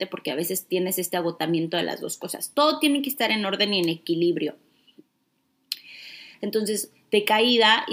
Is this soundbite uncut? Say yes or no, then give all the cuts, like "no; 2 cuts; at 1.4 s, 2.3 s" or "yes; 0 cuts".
no; 1 cut; at 6.3 s